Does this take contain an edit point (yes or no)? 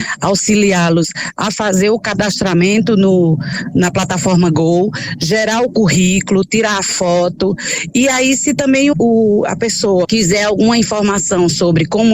yes